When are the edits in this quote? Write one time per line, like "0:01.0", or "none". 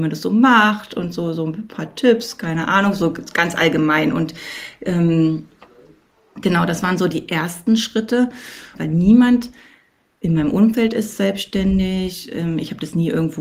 0:08.7